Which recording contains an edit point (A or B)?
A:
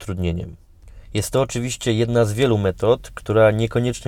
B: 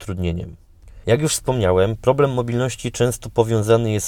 B